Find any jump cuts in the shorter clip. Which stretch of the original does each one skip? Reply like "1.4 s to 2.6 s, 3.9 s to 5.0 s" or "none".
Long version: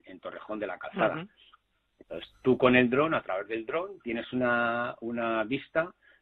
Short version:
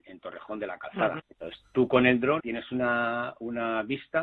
1.2 s to 1.9 s, 3.1 s to 4.0 s